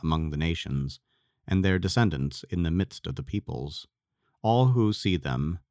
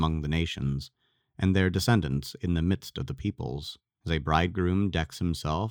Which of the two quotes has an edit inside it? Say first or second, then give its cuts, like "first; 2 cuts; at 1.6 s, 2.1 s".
second; 1 cut; at 4.0 s